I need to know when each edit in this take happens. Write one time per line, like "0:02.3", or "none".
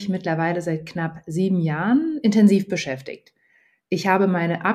none